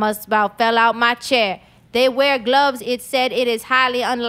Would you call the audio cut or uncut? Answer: cut